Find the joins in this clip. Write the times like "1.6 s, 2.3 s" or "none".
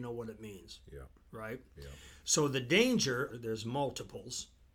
3.3 s